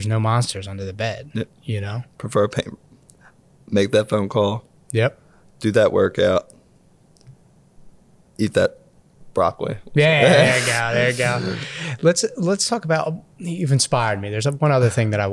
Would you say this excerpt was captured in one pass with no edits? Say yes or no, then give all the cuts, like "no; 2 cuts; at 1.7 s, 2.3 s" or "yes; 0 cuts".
yes; 0 cuts